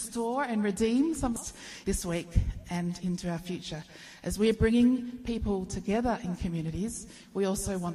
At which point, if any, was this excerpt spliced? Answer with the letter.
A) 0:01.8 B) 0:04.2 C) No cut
A